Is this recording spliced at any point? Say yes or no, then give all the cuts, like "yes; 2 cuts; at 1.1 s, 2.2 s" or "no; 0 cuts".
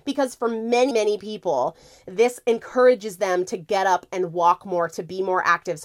yes; 1 cut; at 0.9 s